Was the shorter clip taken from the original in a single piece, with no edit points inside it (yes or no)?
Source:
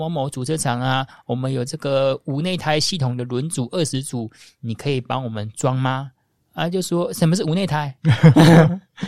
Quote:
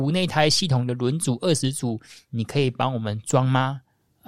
yes